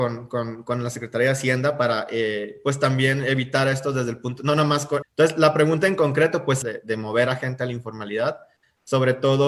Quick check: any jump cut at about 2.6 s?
no; 2 cuts; at 5.0 s, 6.6 s

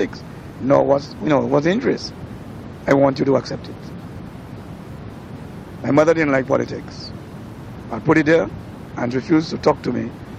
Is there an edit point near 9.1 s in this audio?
yes; 3 cuts; at 5.8 s, 7.8 s, 9.1 s

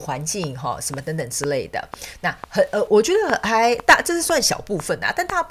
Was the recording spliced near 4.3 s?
no; 1 cut; at 2.9 s

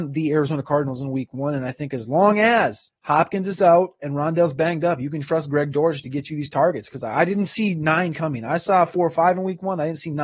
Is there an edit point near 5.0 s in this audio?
no; 0 cuts

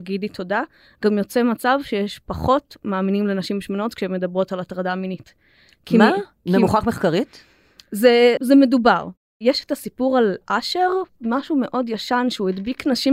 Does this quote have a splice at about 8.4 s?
yes; 1 cut; at 8.4 s

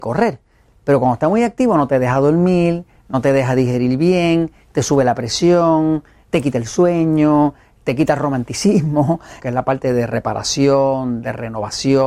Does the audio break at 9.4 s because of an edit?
yes; 1 cut; at 9.4 s

